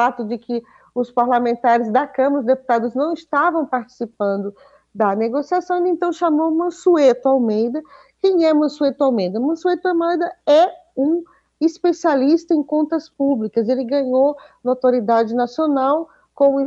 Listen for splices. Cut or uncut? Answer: uncut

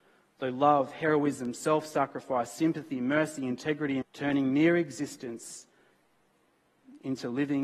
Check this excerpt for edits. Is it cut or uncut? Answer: cut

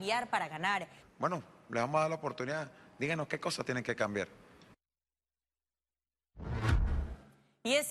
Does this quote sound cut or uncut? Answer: cut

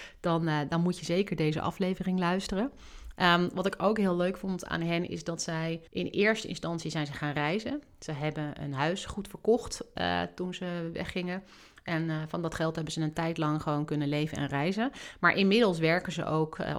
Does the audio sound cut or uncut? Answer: cut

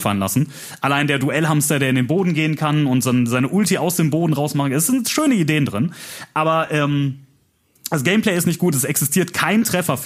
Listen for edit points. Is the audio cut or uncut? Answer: uncut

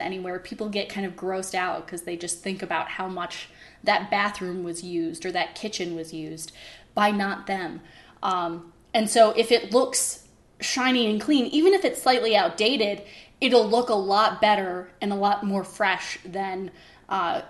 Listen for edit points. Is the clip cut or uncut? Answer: uncut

